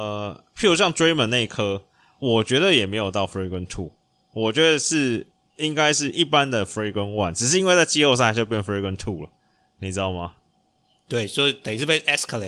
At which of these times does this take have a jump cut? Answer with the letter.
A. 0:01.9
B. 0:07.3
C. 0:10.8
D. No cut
D